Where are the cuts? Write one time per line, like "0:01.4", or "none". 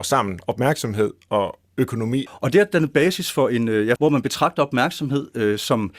0:02.3
0:04.0